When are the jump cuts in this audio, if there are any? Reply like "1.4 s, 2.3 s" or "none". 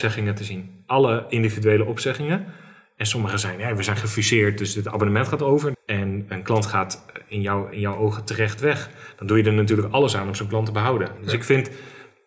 5.7 s, 7.7 s, 11.2 s